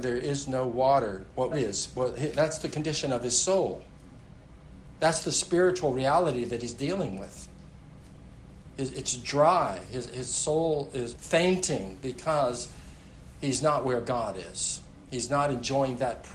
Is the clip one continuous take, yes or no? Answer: no